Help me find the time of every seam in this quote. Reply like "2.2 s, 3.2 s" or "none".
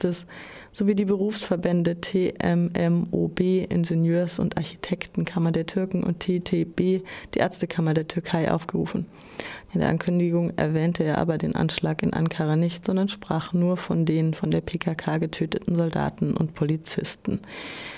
9.7 s